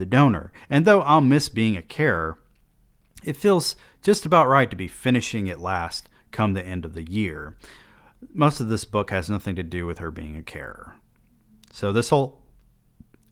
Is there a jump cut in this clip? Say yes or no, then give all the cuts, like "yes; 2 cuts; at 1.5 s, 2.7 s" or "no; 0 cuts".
no; 0 cuts